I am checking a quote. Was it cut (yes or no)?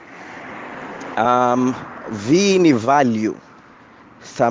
no